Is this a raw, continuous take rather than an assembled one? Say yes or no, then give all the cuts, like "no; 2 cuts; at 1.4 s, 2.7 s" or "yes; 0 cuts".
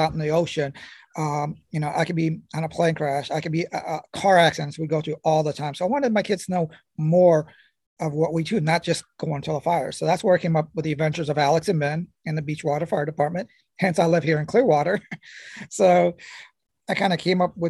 yes; 0 cuts